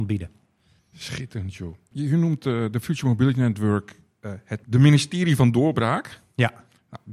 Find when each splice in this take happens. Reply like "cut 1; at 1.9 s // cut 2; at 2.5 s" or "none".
cut 1; at 4.6 s